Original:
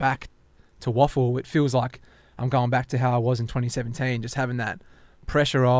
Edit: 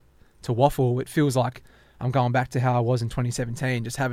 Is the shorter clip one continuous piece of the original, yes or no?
yes